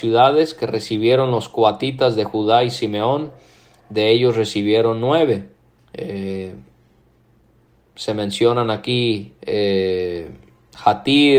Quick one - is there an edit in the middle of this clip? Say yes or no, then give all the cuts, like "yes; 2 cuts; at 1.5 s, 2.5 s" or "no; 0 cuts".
yes; 2 cuts; at 5.8 s, 9.4 s